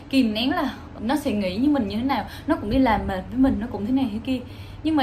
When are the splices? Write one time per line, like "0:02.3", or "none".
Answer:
0:01.0